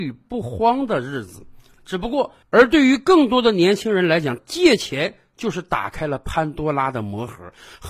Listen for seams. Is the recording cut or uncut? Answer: cut